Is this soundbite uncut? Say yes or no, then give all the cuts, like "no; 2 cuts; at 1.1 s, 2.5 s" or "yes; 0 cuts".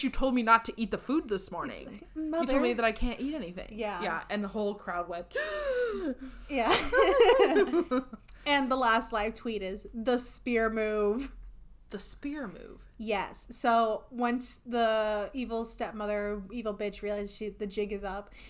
no; 1 cut; at 11.8 s